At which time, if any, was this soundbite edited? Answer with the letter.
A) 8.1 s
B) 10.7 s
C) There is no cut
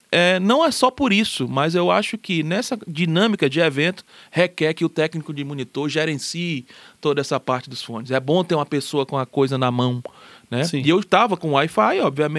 C